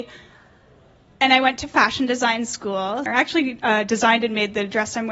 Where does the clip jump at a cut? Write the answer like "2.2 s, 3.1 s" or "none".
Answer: 3.1 s